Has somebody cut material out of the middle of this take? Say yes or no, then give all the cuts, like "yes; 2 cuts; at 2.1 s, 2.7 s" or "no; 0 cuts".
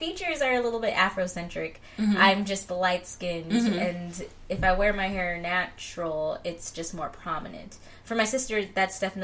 no; 0 cuts